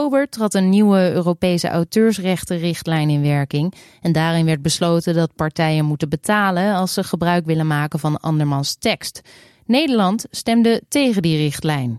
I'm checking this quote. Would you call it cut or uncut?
uncut